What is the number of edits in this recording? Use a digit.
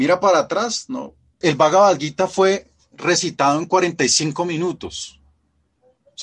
1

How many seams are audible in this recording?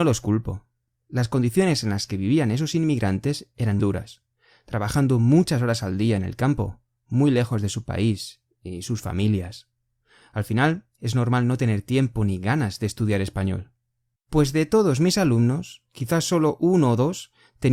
2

